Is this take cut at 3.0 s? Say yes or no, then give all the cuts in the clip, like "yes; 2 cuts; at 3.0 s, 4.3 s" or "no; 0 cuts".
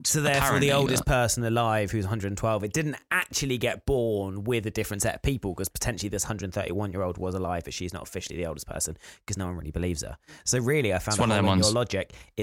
no; 0 cuts